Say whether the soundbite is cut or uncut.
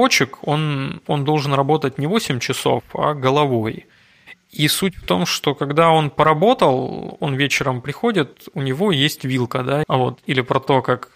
cut